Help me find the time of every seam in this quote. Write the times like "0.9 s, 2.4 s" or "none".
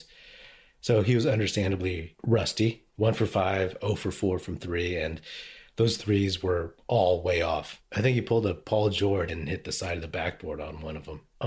9.3 s